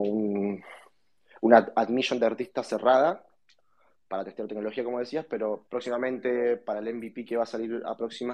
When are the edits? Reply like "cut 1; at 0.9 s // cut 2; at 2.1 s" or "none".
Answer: cut 1; at 5.7 s